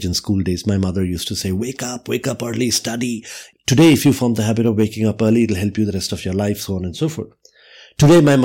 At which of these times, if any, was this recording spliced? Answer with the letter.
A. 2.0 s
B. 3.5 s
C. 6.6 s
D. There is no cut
B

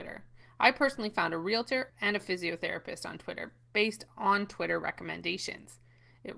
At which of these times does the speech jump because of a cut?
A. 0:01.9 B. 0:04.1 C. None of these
A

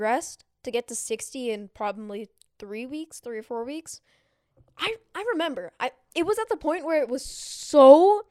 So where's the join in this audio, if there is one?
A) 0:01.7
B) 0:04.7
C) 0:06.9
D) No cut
D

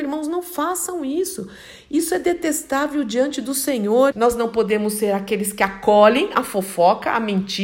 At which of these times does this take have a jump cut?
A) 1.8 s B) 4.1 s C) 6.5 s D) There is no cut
B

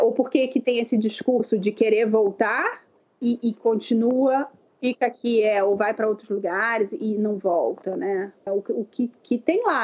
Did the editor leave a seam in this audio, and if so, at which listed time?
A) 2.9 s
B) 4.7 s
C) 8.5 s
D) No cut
C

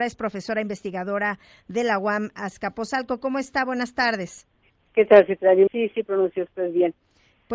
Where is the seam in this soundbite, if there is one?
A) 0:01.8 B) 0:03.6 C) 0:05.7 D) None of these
C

